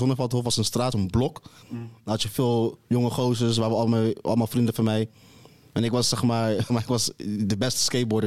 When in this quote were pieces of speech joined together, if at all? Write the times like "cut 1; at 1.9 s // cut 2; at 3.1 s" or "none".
cut 1; at 0.9 s // cut 2; at 6.7 s